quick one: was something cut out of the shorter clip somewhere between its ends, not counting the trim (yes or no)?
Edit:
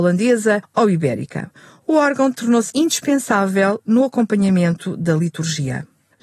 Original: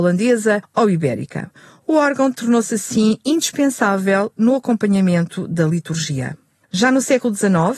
yes